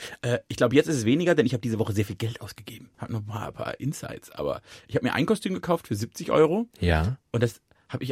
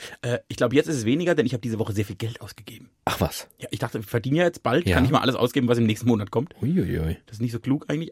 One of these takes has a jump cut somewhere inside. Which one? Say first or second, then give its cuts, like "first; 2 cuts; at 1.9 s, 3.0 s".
first; 2 cuts; at 2.9 s, 6.7 s